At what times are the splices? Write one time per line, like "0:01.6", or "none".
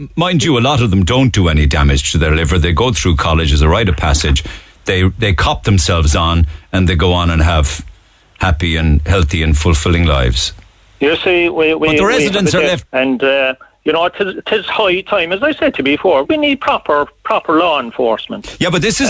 0:12.8
0:16.2